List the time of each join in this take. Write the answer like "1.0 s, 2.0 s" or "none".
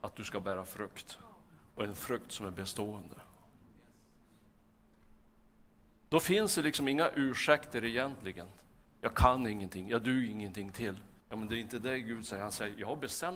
8.8 s, 11.2 s

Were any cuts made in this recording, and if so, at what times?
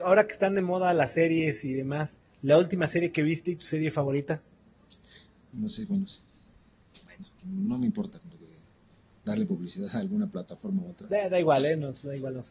5.5 s, 7.4 s

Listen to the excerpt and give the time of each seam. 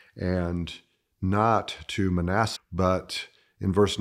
2.6 s

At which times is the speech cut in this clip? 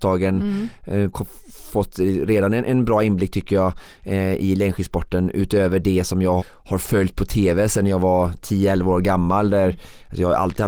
1.1 s, 6.4 s

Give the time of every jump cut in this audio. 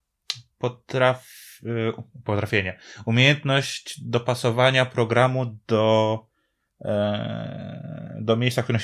none

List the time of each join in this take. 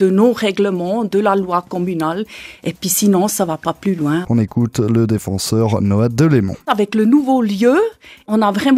4.2 s, 6.6 s

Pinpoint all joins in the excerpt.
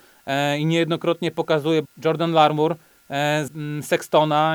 1.8 s, 3.5 s

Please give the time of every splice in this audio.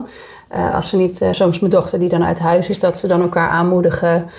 none

